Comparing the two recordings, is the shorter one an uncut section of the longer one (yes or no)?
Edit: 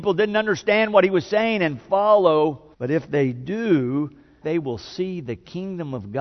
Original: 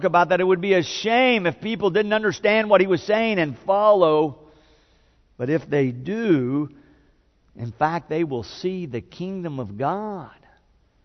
no